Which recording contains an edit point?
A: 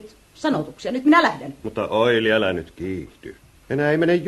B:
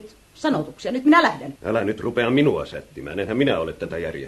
B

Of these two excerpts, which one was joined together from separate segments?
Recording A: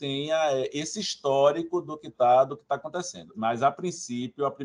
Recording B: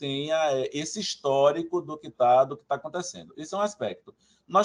A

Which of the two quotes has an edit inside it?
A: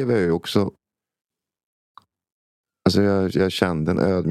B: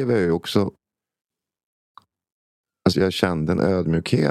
B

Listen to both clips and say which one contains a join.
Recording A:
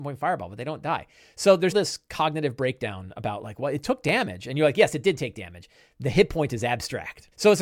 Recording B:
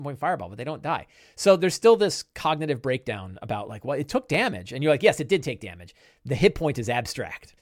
A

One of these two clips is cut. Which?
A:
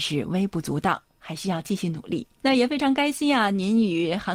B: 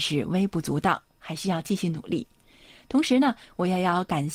A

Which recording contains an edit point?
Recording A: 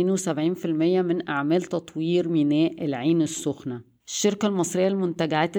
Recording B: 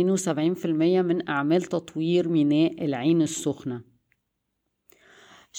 A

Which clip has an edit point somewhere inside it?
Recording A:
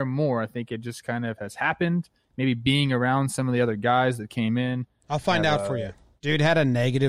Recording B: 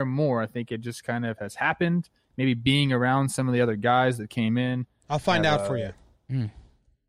A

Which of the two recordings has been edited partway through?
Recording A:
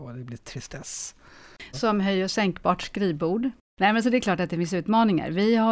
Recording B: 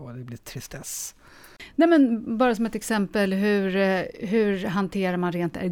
A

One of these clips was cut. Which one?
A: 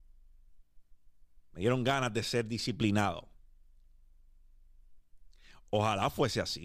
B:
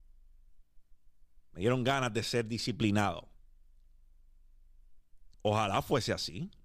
B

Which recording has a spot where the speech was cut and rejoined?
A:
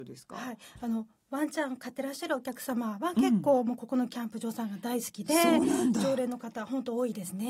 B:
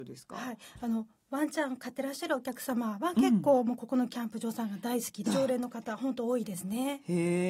B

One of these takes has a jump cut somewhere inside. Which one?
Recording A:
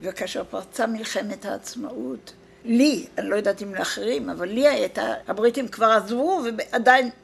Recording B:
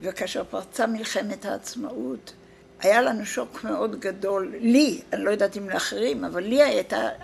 A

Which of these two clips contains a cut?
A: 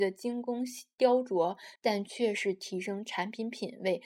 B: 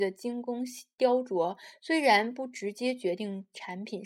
A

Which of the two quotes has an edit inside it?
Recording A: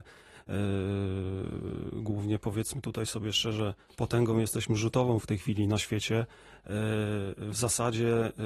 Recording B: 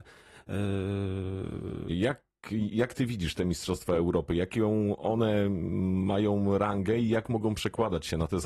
B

